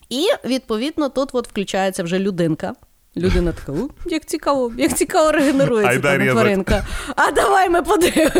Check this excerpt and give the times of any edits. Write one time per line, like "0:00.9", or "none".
none